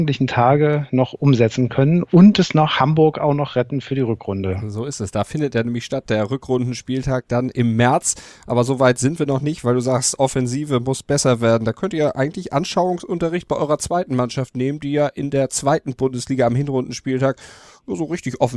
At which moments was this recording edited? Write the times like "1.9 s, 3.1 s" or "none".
none